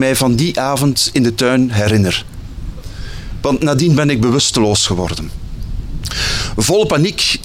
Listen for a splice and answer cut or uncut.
uncut